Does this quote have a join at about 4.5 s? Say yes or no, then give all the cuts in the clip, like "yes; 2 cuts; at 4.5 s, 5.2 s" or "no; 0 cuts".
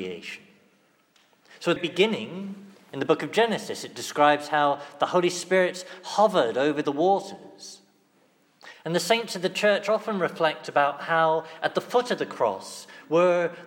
no; 2 cuts; at 1.8 s, 8.7 s